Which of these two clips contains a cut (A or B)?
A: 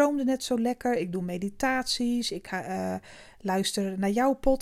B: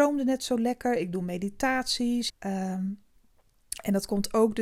B